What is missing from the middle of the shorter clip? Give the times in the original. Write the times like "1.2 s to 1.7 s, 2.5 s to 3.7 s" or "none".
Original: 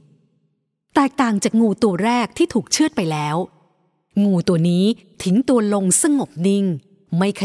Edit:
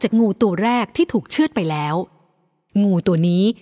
none